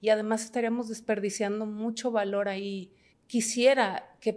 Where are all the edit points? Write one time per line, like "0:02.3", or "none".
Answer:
0:03.1